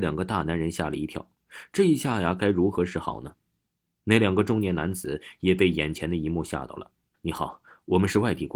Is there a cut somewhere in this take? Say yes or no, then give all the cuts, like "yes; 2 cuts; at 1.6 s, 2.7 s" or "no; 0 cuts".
yes; 1 cut; at 7.1 s